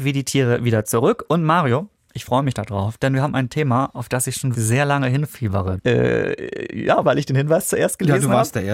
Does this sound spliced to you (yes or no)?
yes